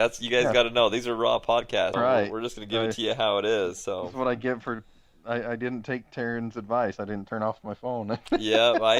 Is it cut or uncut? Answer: cut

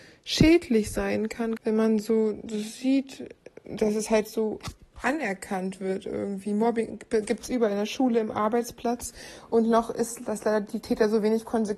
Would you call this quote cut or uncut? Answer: cut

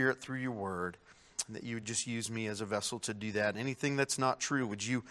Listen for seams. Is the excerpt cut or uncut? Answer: uncut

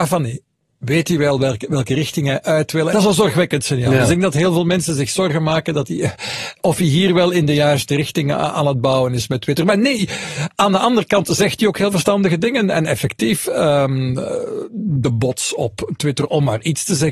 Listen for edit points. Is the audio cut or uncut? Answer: cut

